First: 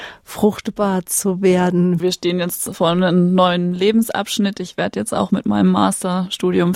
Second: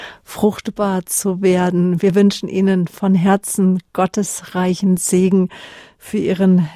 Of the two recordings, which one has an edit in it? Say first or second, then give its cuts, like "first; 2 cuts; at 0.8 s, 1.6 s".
first; 1 cut; at 2.0 s